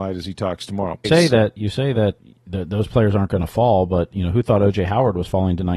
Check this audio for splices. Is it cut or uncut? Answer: cut